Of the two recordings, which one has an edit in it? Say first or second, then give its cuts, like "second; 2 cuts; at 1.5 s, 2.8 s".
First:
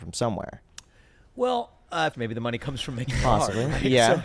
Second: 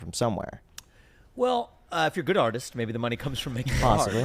first; 1 cut; at 2.1 s